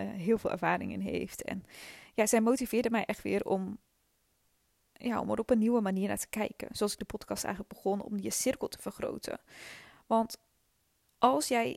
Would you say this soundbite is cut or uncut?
uncut